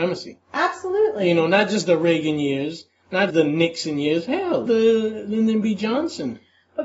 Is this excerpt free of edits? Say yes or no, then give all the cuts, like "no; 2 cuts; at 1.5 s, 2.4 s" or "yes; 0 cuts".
no; 2 cuts; at 3.3 s, 4.7 s